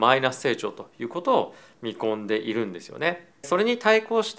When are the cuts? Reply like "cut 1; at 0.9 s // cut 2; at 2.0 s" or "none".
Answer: cut 1; at 3.4 s